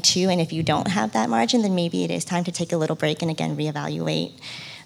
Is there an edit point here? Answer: yes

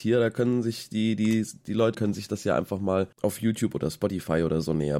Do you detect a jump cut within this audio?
yes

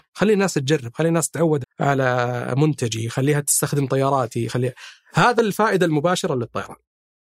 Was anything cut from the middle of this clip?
yes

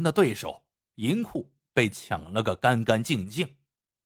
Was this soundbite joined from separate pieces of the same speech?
no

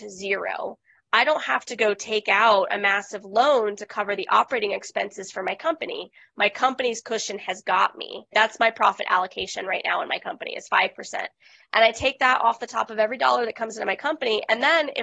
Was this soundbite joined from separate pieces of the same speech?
yes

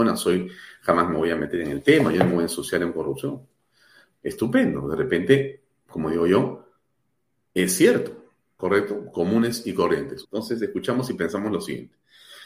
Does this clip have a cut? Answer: yes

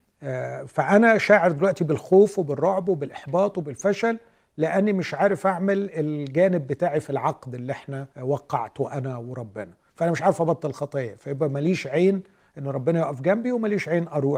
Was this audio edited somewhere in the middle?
yes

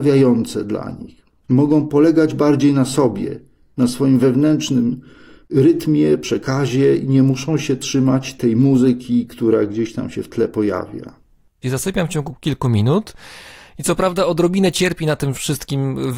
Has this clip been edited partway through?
yes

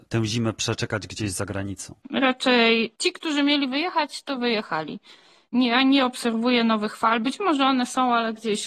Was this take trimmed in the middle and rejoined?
yes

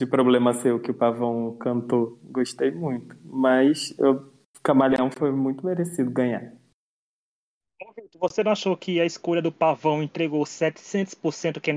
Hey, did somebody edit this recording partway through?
no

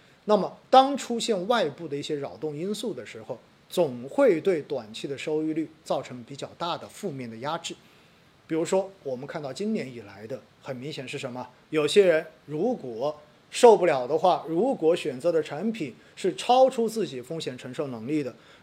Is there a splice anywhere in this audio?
yes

